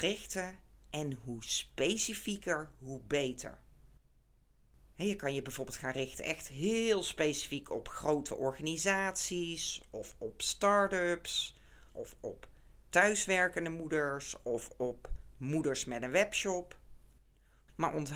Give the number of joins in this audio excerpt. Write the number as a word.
one